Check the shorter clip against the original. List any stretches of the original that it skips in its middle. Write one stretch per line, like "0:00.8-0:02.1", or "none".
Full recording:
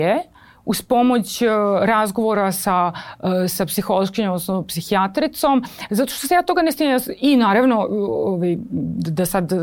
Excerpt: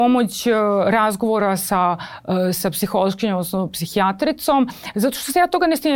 none

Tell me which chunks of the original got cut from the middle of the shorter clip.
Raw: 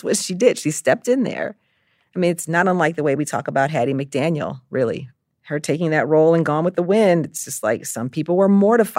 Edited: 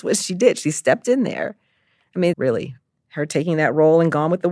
0:02.3-0:04.7

